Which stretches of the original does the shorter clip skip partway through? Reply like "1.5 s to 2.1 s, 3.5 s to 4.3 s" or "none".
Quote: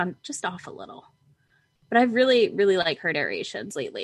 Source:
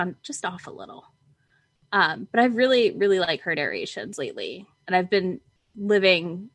1.9 s to 2.3 s